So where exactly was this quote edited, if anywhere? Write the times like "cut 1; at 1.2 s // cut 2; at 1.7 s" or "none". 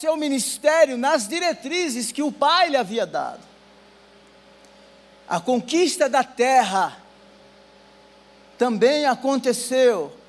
none

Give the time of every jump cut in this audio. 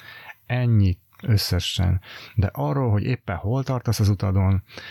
none

